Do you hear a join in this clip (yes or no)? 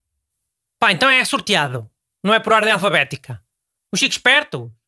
yes